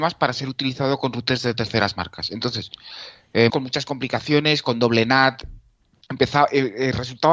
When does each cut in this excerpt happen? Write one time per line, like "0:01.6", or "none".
0:03.5